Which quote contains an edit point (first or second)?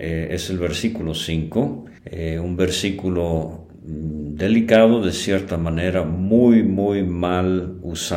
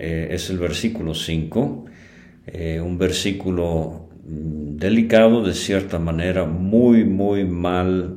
first